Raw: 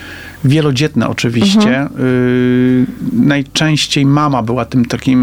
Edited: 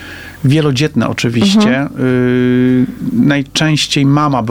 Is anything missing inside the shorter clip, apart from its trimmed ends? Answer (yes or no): no